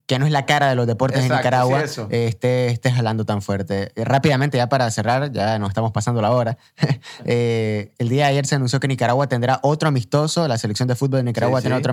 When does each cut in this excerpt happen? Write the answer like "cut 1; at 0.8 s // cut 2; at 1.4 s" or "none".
none